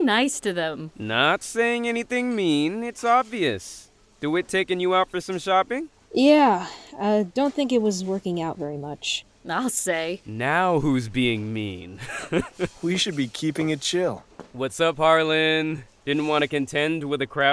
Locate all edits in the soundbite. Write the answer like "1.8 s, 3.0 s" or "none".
none